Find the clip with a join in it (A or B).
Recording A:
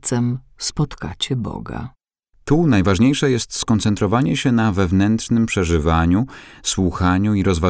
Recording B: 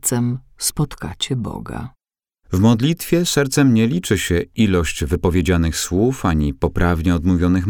A